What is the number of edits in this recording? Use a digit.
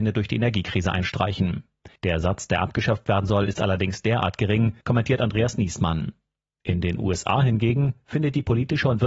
2